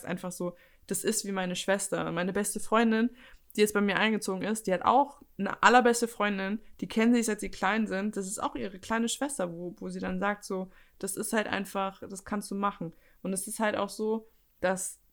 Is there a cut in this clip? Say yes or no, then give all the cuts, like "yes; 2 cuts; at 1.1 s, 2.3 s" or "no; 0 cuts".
no; 0 cuts